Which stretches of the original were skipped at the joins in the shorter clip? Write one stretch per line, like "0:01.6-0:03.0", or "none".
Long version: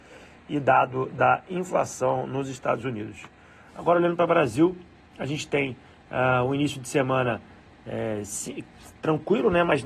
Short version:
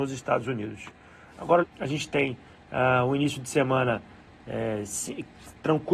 0:04.0-0:05.0